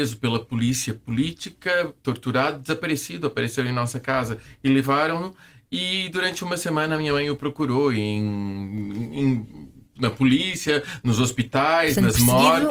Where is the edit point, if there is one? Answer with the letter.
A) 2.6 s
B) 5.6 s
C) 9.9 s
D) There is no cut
D